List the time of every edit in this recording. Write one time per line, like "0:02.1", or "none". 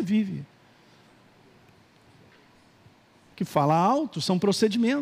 none